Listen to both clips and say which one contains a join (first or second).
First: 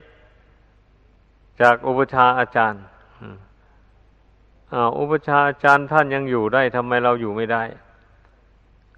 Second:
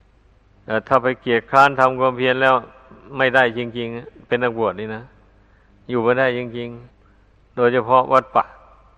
second